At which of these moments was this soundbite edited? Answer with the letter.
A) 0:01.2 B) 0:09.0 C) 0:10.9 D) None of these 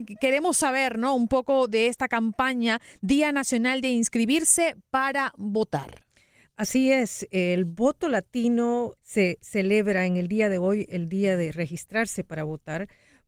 B